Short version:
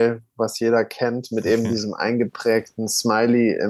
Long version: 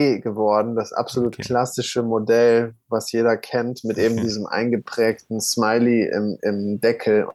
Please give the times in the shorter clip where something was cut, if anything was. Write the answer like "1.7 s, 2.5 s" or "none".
none